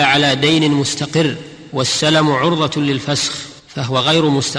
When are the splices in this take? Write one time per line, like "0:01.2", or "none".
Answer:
0:03.6